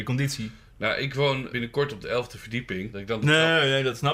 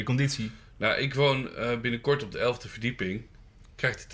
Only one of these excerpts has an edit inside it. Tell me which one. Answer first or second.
first